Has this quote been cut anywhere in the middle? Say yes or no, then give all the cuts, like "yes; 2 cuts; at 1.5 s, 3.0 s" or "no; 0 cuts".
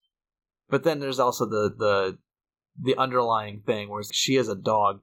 yes; 1 cut; at 4.1 s